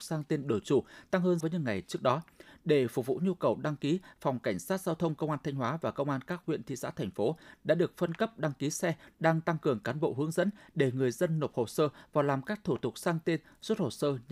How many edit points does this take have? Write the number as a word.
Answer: two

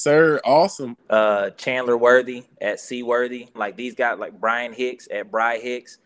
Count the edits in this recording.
two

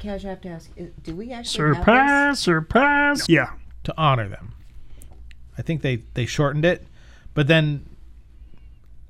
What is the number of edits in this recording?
two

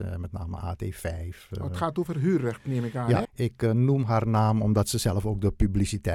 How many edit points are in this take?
one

